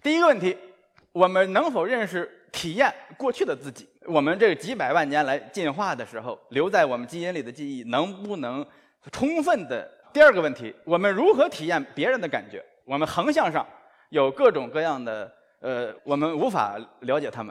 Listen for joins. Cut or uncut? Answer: cut